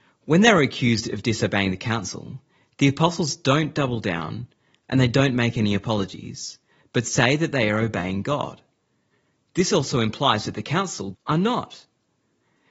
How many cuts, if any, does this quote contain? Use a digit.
1